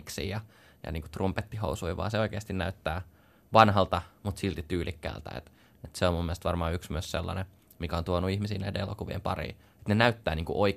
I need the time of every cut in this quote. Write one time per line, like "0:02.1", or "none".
none